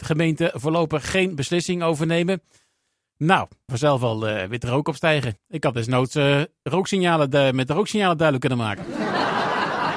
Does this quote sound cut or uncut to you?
cut